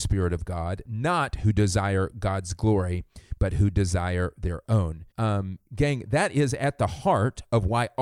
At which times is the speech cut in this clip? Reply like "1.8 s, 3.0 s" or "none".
5.1 s